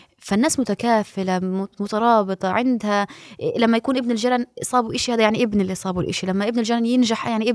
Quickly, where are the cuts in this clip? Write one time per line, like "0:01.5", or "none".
none